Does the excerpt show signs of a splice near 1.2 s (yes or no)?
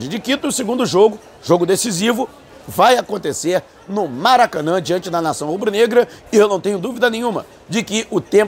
no